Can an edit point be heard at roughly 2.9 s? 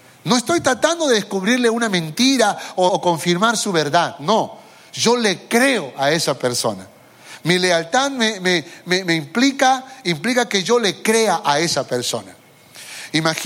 yes; 1 cut; at 2.9 s

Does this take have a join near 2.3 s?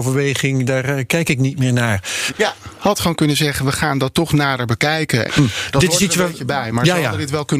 yes; 2 cuts; at 2.3 s, 5.3 s

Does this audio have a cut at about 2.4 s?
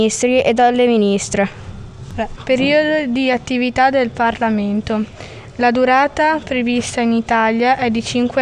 yes; 1 cut; at 2.4 s

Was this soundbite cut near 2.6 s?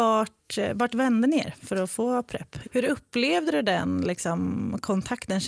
yes; 1 cut; at 2.6 s

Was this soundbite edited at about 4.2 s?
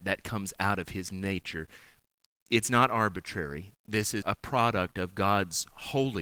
yes; 1 cut; at 4.2 s

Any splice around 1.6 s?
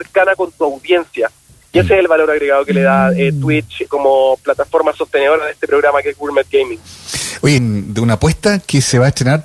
no; 2 cuts; at 3.9 s, 7.6 s

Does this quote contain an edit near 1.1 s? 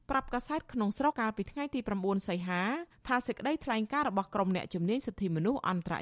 yes; 1 cut; at 1.1 s

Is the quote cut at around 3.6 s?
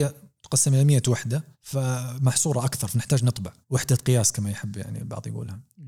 yes; 2 cuts; at 1.5 s, 3.6 s

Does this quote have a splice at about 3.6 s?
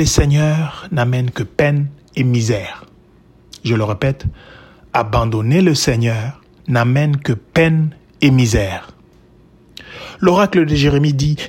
no; 0 cuts

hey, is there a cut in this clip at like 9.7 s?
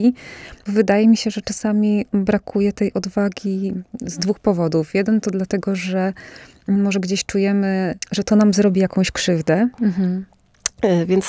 yes; 1 cut; at 9.7 s

